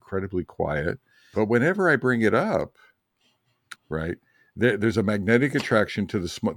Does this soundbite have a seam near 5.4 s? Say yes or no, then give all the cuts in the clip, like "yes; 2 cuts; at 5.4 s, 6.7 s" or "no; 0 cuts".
no; 2 cuts; at 1.3 s, 3.8 s